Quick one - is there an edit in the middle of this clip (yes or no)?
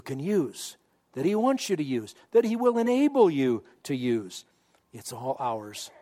yes